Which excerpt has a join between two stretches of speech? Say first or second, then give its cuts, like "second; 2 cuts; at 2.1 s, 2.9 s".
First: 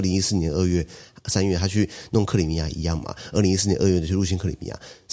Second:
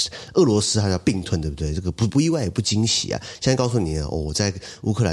second; 1 cut; at 2.1 s